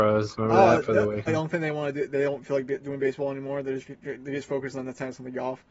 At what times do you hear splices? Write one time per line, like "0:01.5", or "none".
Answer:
0:01.3